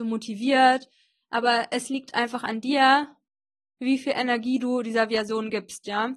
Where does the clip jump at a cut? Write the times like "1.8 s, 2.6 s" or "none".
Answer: none